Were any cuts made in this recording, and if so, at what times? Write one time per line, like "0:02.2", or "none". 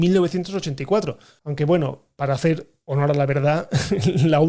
none